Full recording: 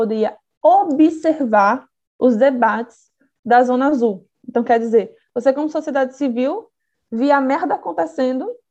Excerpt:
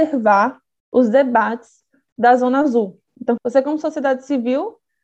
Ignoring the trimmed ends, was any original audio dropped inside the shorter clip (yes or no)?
yes